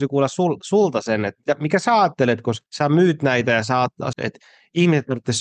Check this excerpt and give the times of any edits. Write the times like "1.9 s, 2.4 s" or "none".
2.7 s, 4.1 s